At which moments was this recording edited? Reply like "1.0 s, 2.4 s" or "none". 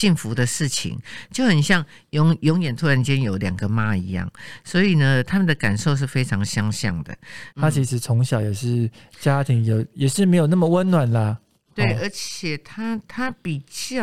7.5 s